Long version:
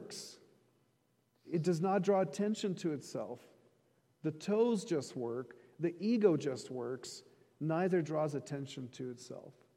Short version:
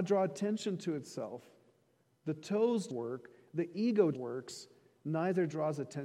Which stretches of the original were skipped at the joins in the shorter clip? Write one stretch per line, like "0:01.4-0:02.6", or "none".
0:04.9-0:05.1
0:06.4-0:06.7